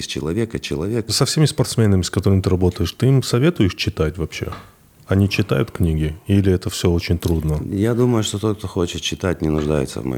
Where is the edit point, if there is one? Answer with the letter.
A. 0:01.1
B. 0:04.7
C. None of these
A